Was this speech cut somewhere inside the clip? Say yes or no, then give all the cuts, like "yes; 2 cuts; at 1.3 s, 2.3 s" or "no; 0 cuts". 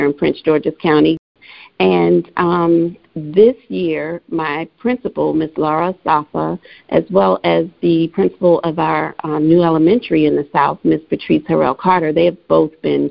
no; 0 cuts